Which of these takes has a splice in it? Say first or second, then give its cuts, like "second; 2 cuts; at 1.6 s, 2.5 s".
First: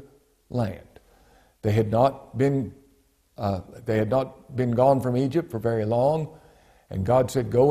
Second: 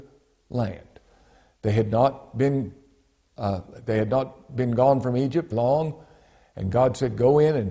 second; 1 cut; at 5.5 s